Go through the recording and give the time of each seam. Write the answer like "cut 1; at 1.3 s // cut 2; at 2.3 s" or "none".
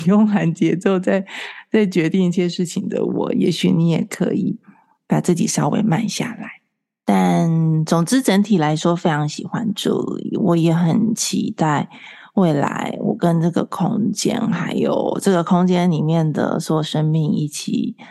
none